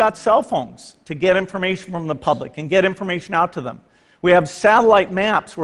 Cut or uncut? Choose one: uncut